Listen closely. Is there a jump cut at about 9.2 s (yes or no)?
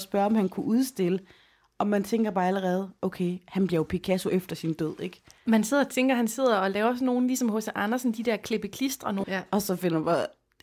yes